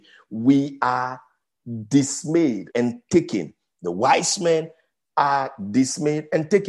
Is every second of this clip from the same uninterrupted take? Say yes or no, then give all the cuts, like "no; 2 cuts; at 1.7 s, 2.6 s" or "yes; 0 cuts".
no; 1 cut; at 2.7 s